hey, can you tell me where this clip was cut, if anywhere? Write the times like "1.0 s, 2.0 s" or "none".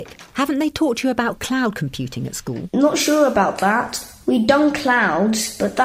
none